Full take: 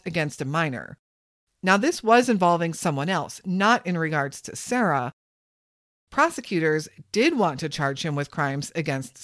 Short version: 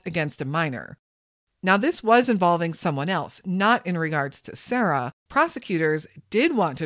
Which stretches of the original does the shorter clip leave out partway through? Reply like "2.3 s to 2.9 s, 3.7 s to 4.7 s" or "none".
5.2 s to 6.0 s